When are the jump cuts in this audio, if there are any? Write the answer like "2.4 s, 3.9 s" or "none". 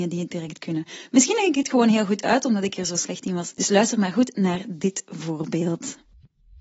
3.5 s